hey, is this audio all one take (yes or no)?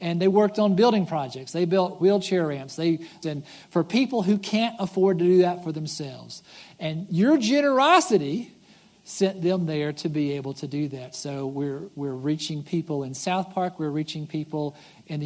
no